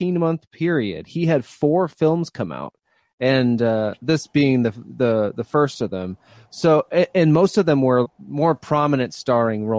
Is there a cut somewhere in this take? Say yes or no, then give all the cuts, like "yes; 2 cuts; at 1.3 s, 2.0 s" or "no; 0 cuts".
yes; 1 cut; at 8.0 s